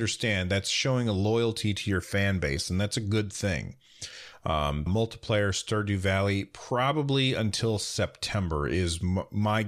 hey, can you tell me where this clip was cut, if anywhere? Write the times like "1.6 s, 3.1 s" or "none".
4.9 s